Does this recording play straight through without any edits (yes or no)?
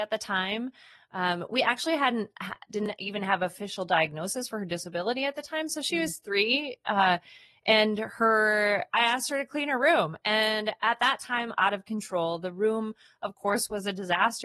no